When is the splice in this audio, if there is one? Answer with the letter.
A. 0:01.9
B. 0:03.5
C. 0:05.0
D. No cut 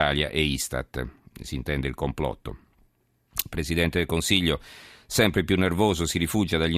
D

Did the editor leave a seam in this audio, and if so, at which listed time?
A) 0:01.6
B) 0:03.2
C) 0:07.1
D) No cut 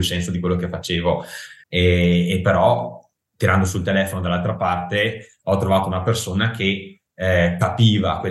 A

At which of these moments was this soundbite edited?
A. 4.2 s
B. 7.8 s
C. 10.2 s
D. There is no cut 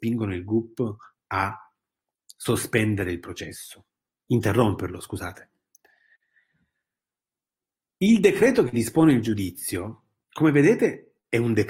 A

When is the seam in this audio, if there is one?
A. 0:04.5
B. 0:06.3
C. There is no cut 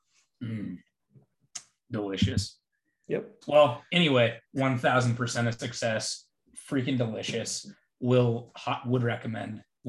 A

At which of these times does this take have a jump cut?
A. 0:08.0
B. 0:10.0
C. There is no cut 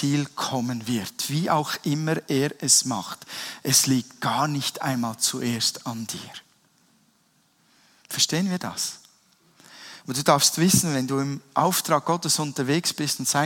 B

